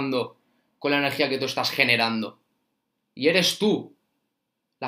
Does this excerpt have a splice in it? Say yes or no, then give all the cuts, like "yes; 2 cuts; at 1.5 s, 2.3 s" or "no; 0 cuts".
no; 0 cuts